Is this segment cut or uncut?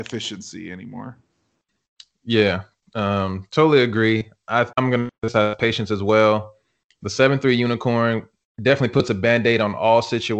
cut